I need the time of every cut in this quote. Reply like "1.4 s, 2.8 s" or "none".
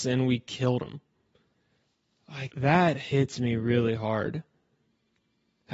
2.5 s